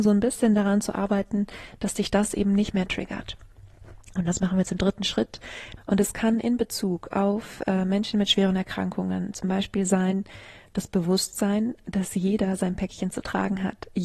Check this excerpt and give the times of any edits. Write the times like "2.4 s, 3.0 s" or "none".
5.8 s